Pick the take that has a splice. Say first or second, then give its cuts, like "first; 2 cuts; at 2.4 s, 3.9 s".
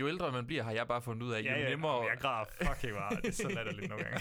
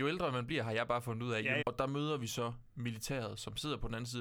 second; 1 cut; at 1.6 s